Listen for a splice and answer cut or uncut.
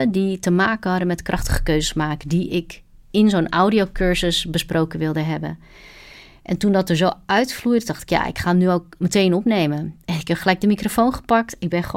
uncut